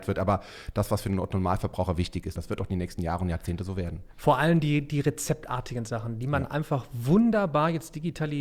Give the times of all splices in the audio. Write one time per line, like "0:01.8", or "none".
0:02.4